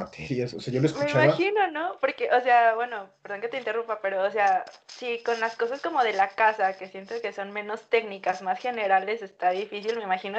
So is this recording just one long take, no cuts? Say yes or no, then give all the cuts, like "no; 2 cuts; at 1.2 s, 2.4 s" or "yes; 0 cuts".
yes; 0 cuts